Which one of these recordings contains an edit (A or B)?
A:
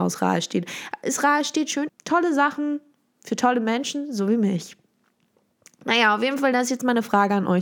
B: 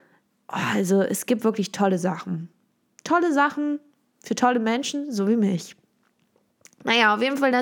A